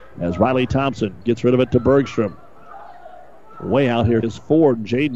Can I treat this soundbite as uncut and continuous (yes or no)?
no